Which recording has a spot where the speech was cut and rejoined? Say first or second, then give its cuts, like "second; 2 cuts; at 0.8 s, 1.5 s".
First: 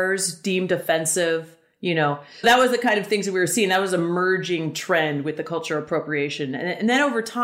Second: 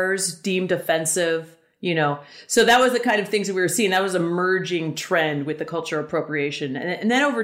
first; 1 cut; at 2.4 s